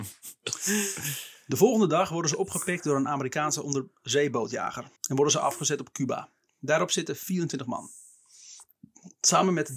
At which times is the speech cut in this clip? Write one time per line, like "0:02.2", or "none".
0:05.0
0:06.5